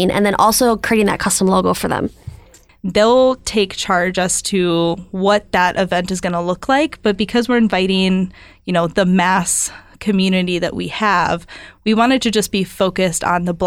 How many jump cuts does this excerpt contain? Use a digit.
1